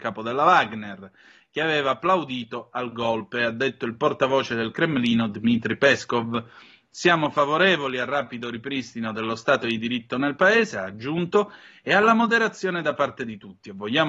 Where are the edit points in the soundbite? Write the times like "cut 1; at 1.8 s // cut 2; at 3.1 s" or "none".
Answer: none